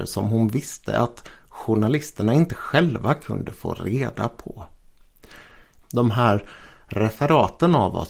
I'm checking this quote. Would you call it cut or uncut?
cut